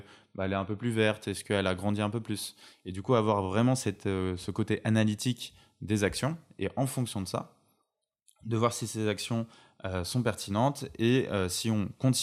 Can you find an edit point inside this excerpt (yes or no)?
no